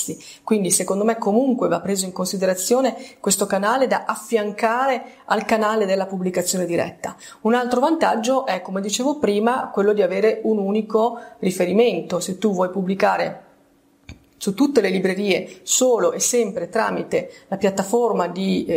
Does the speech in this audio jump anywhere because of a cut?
no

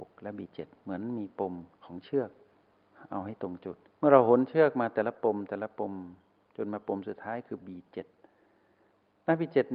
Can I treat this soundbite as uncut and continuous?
no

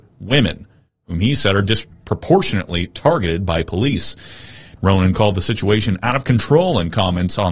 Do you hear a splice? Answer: yes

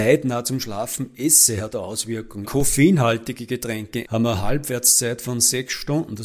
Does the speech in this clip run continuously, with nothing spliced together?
no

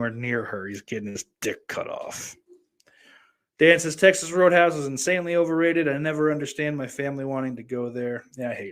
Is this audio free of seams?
yes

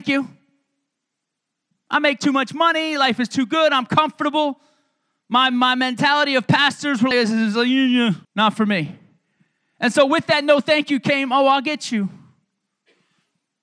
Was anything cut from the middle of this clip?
yes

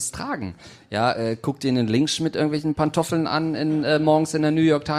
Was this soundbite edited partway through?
no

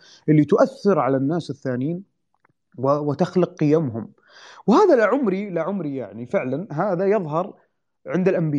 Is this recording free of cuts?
yes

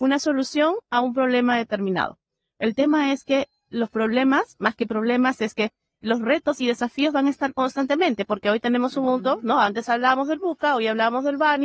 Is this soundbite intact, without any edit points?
yes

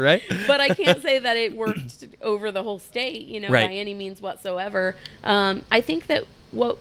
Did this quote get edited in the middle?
no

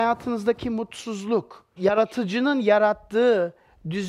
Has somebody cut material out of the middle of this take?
yes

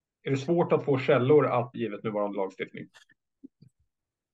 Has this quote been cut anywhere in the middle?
yes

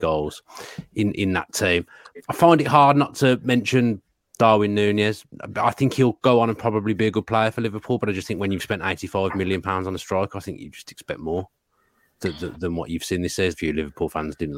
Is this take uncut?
no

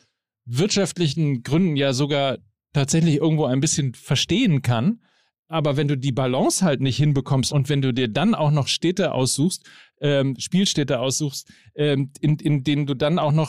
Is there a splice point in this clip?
yes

